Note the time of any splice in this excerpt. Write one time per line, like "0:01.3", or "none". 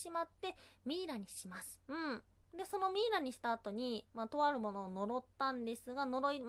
0:01.8